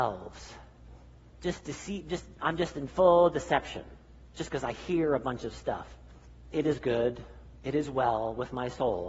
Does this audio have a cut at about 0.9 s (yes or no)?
no